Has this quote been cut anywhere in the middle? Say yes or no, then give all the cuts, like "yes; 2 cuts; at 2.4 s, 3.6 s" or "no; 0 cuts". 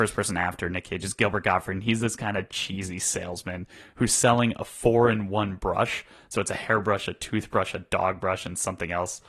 no; 0 cuts